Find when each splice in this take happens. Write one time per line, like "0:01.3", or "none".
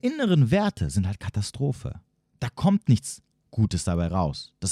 0:02.3